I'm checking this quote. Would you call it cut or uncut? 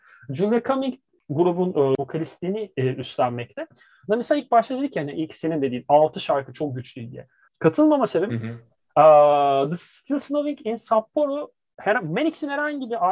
cut